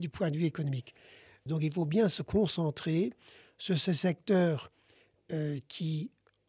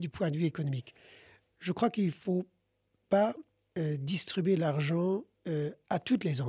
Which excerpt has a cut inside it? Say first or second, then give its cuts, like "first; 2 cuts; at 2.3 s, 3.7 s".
first; 1 cut; at 1.5 s